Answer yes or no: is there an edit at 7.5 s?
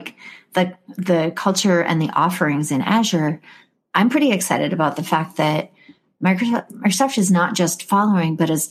no